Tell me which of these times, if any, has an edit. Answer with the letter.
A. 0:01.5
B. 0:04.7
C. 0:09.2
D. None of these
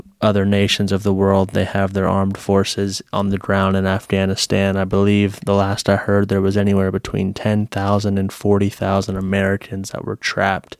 D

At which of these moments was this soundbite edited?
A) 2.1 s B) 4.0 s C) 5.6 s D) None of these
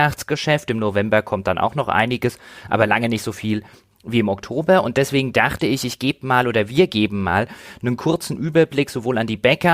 D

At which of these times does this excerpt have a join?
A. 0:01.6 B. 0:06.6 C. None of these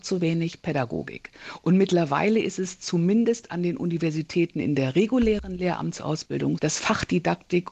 B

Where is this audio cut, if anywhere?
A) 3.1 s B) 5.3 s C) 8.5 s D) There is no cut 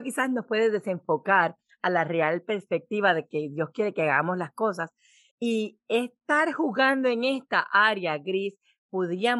D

